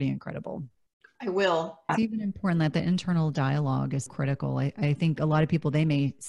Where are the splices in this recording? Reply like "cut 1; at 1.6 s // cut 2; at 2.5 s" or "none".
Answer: cut 1; at 1.9 s // cut 2; at 4.1 s